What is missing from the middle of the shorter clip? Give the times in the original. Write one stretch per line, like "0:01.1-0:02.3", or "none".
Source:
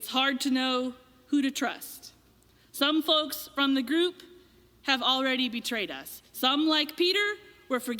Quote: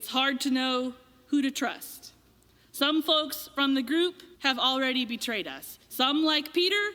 0:04.3-0:04.8